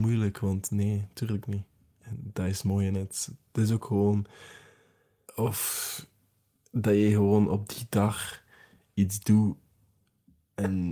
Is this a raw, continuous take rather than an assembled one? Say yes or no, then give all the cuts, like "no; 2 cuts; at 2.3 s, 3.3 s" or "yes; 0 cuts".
no; 1 cut; at 5.3 s